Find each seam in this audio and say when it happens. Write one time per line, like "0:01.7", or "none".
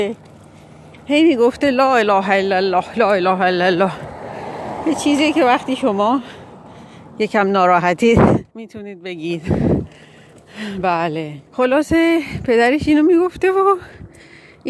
0:08.5
0:11.5